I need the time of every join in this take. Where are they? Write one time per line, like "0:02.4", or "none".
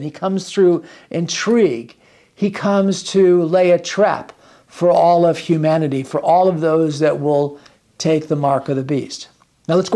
none